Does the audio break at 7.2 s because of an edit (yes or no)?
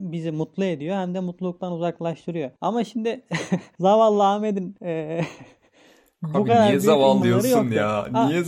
yes